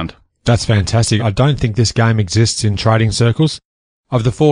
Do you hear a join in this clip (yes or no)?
yes